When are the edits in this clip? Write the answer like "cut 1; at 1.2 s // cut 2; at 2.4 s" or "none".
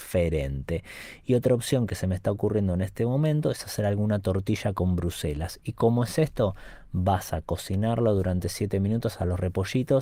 none